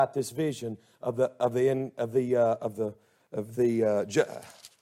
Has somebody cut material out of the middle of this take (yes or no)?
no